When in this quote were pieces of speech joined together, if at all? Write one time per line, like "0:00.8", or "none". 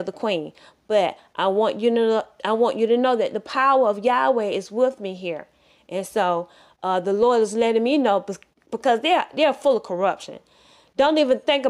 none